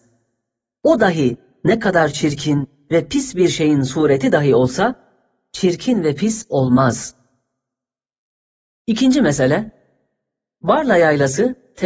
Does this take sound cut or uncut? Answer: uncut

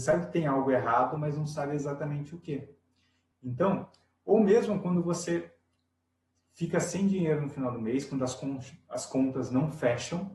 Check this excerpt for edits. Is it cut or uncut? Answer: cut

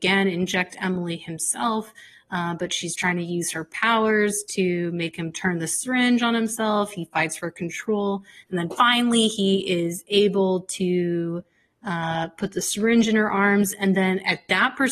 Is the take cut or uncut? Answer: uncut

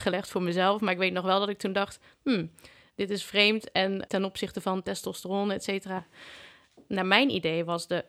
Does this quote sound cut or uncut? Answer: cut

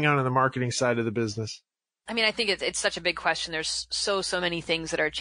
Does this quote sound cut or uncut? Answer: uncut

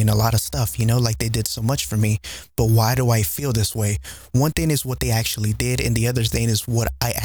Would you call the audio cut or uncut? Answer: uncut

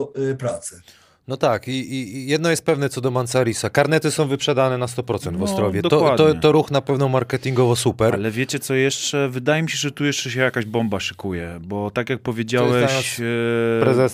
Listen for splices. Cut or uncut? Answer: uncut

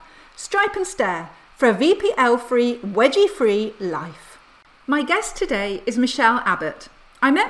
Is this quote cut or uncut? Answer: uncut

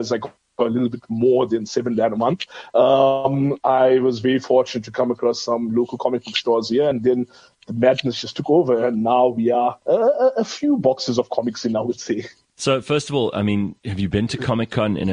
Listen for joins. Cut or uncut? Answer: uncut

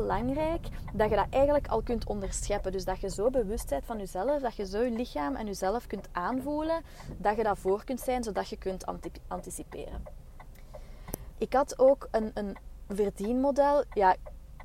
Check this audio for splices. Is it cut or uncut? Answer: cut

